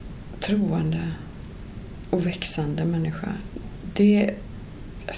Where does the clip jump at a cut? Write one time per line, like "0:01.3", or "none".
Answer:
none